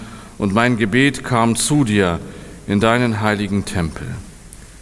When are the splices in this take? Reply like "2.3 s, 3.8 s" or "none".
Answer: none